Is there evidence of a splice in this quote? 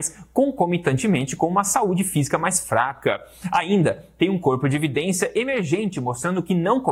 no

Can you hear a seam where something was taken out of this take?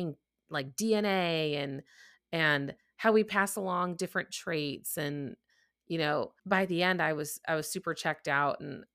yes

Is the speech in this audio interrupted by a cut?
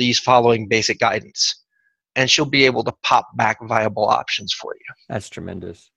no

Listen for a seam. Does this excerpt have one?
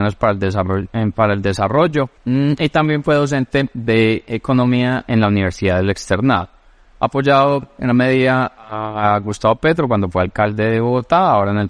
yes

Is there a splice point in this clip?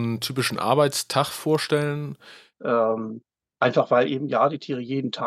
yes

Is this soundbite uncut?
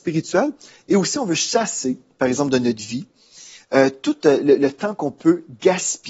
yes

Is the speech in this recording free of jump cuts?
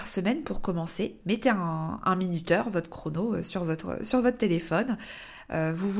yes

